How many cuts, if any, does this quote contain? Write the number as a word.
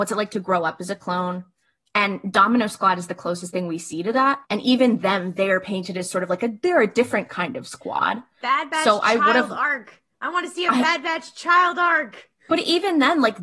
one